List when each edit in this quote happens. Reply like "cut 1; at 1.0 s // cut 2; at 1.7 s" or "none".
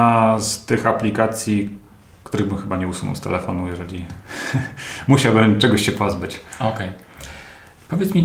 none